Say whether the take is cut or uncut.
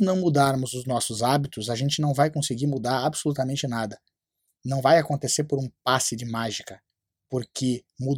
uncut